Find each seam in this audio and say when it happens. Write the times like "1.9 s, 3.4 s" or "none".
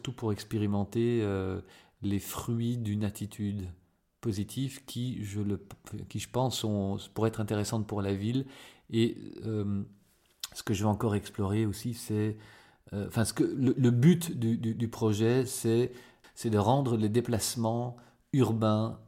none